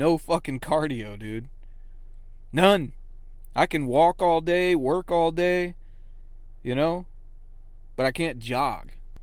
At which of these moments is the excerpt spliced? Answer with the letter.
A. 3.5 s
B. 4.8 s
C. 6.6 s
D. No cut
D